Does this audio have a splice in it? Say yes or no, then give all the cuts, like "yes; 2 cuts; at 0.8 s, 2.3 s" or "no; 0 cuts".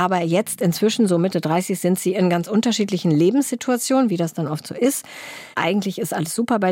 yes; 1 cut; at 5.5 s